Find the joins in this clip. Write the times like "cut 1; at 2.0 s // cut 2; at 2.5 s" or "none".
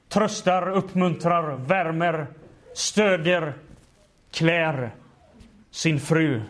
none

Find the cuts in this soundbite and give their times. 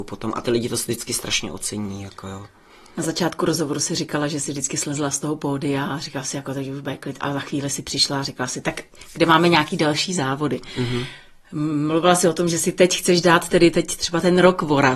none

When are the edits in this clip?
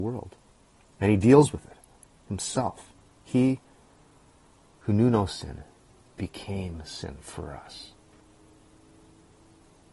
none

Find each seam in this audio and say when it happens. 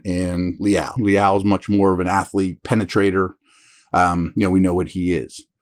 cut 1; at 1.0 s

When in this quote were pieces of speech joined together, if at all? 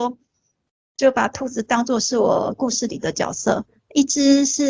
none

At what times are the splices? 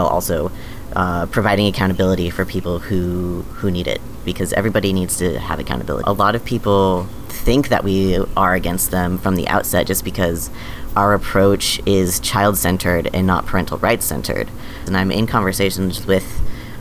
cut 1; at 6.0 s // cut 2; at 14.9 s

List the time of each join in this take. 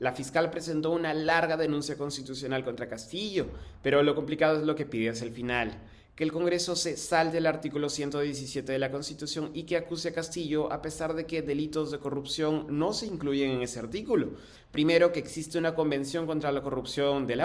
cut 1; at 14.6 s

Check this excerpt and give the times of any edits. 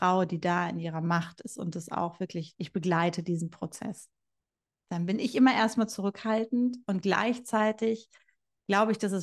cut 1; at 4.8 s

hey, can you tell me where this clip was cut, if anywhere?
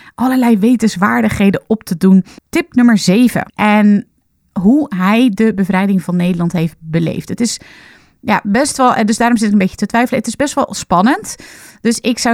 cut 1; at 2.4 s // cut 2; at 3.5 s

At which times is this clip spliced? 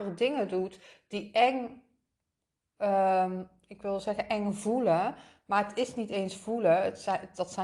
none

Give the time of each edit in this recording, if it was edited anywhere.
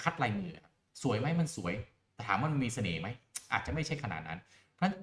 none

